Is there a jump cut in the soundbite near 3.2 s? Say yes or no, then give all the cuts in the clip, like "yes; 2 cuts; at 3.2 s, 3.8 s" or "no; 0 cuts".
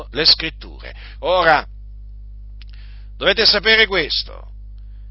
no; 1 cut; at 1.2 s